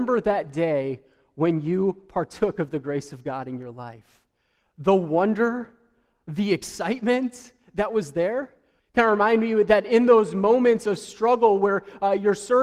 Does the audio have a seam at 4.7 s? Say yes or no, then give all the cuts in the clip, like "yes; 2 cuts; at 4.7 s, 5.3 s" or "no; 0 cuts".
no; 1 cut; at 8.8 s